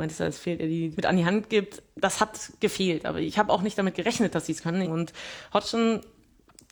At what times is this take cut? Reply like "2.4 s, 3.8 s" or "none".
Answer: 0.9 s, 4.8 s

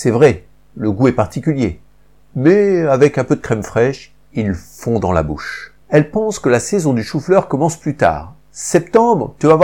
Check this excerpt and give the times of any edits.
5.8 s

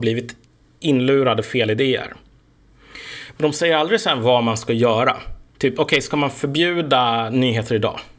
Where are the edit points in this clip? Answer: 5.5 s

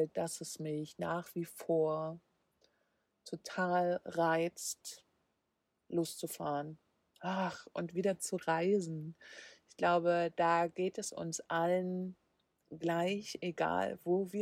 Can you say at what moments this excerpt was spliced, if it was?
none

